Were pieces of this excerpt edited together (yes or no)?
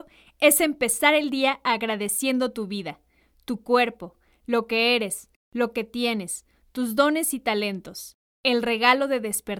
no